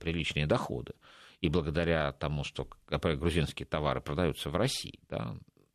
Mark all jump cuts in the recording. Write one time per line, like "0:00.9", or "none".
none